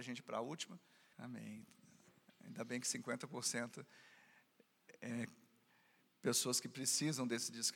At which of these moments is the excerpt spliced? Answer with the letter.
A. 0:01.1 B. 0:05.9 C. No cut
A